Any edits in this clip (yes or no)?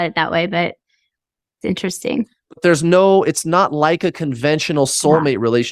no